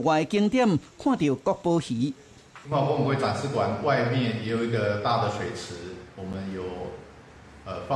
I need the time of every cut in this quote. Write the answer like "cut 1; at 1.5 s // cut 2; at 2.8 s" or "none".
none

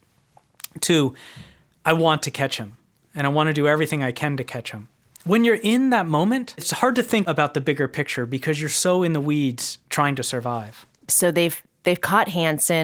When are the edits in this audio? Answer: none

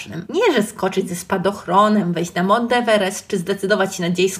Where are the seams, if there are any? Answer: none

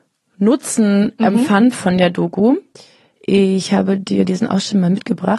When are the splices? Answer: none

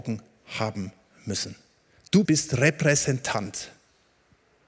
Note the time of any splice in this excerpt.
cut 1; at 2.2 s

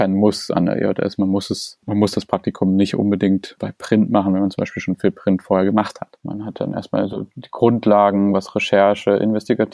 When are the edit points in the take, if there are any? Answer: cut 1; at 6.2 s

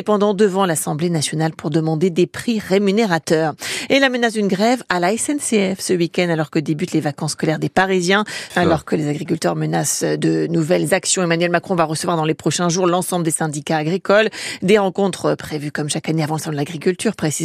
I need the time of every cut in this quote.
cut 1; at 8.5 s

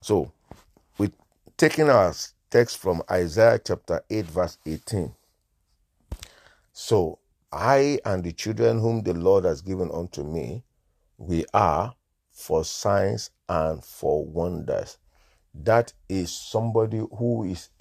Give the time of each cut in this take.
cut 1; at 6.7 s

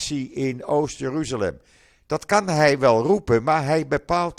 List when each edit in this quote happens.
none

